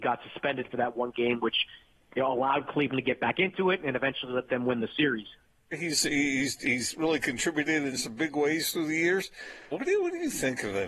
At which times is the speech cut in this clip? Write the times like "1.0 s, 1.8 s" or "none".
5.7 s, 9.7 s